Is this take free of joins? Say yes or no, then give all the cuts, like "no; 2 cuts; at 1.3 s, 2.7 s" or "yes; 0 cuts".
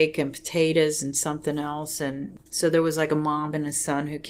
no; 1 cut; at 2.5 s